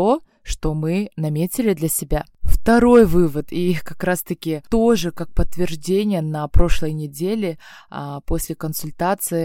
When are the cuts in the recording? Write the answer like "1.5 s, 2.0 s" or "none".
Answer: none